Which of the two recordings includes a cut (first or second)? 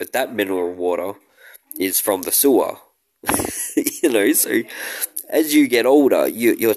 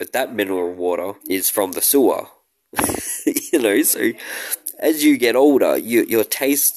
second